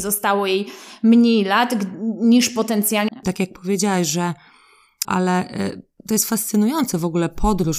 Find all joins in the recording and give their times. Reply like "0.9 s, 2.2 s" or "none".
3.1 s, 5.0 s